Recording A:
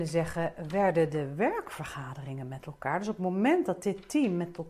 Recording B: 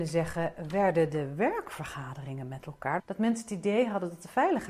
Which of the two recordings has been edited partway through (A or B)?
B